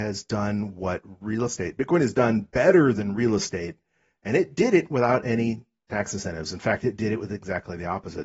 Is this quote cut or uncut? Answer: uncut